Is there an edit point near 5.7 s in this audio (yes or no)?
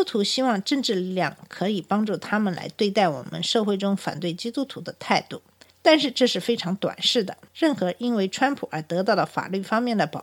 yes